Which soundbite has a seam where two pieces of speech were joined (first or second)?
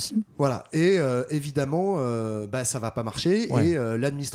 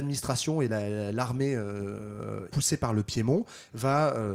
second